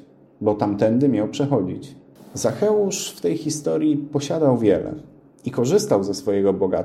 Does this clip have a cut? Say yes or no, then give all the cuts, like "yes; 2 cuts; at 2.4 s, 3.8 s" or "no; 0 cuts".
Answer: yes; 1 cut; at 2.2 s